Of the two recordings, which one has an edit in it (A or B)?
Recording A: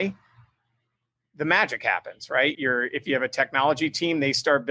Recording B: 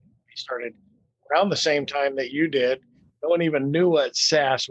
A